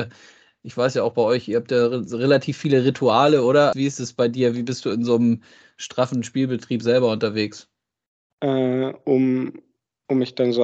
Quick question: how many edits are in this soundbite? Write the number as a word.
two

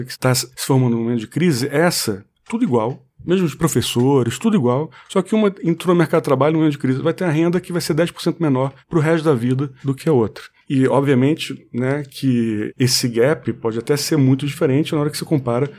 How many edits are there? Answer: zero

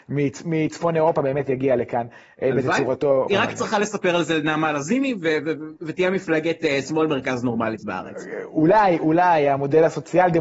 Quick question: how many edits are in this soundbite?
one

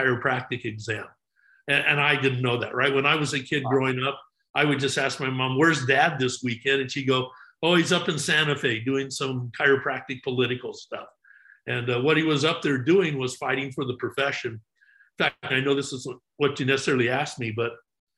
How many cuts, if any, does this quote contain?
one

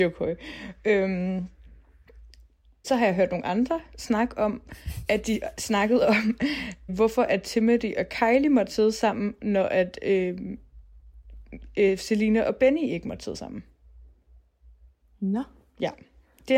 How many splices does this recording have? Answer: two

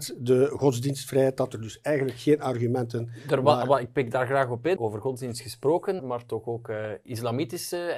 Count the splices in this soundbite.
two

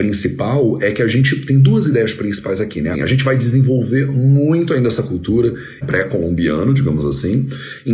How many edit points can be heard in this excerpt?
two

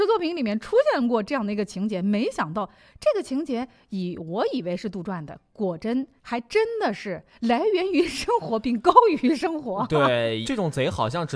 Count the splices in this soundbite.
two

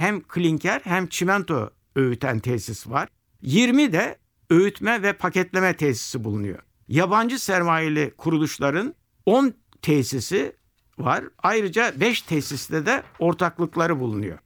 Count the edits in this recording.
one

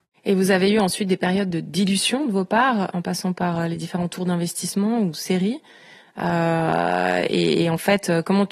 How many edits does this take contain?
zero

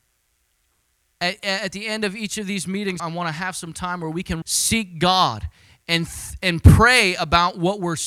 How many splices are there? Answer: two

